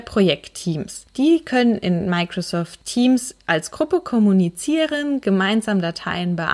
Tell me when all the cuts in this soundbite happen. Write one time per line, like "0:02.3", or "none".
none